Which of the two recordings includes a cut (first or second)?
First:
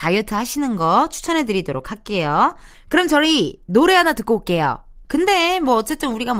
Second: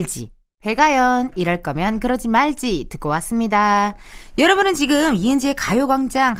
first